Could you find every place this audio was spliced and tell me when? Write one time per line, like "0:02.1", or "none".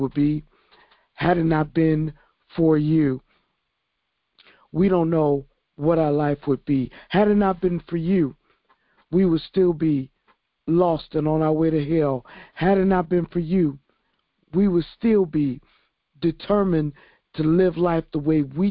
none